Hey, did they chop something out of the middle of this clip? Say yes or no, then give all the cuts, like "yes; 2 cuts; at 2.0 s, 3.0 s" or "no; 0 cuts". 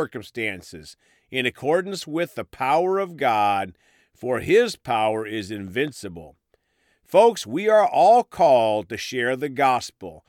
no; 0 cuts